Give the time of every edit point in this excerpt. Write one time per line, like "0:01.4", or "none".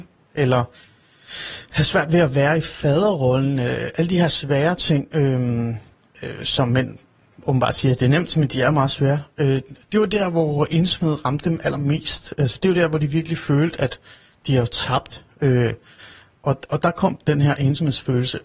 none